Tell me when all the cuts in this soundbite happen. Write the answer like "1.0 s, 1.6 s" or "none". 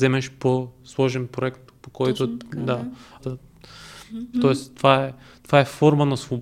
3.2 s, 4.3 s